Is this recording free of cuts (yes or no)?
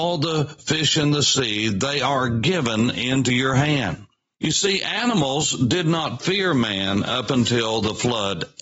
yes